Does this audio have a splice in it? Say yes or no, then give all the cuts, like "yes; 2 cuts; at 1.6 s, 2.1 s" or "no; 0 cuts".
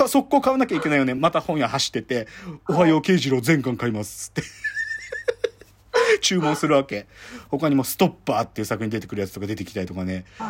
no; 0 cuts